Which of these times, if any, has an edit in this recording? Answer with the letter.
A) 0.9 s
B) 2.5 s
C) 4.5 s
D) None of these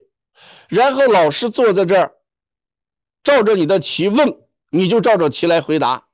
D